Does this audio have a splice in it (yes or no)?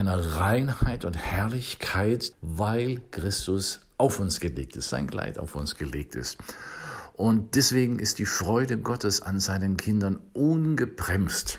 yes